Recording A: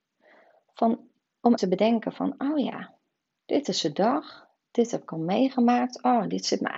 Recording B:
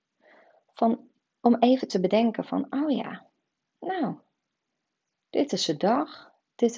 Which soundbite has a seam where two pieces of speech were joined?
A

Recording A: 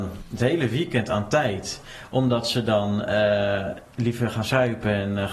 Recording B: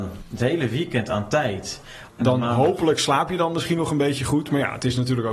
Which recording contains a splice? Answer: B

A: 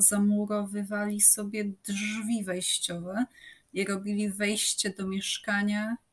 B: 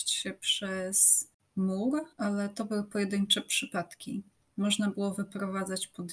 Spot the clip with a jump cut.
B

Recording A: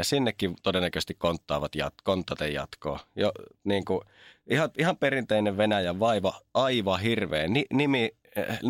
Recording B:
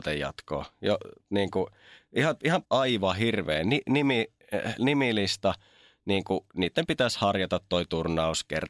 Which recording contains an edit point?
B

